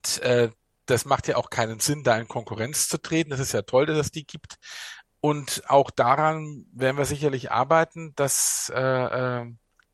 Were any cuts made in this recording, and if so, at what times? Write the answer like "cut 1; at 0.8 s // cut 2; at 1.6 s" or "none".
cut 1; at 5.1 s